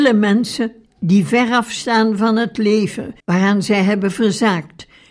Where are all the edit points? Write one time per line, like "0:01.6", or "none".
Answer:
0:03.2